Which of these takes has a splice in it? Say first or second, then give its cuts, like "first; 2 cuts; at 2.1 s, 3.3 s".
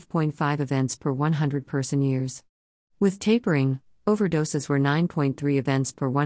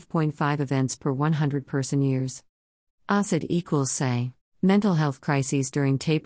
second; 2 cuts; at 2.9 s, 4.5 s